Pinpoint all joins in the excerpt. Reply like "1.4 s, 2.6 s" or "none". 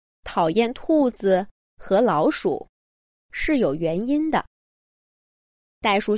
5.1 s